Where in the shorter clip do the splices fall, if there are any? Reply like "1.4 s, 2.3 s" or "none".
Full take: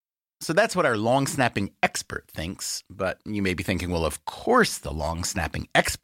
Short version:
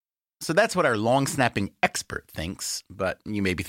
none

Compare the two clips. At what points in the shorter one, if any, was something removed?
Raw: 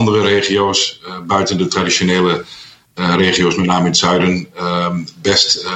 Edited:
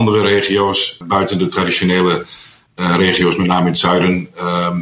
1.0 s

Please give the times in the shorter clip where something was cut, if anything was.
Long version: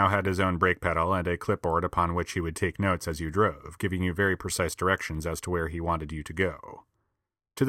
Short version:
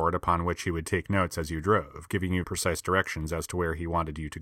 2.4 s

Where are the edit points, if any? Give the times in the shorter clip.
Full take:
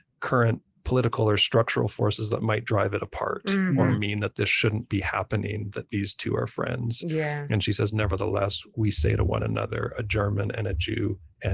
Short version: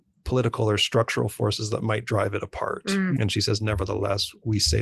3.2 s

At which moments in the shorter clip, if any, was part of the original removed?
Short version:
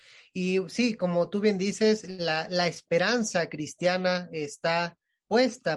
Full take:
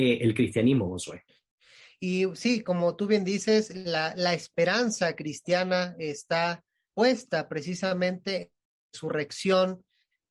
none

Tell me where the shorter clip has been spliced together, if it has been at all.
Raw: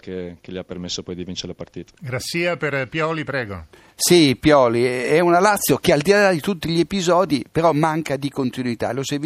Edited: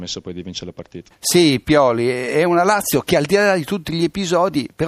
1.1 s

